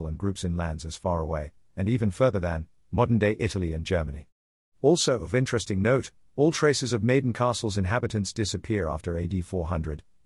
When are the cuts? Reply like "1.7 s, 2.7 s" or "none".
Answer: none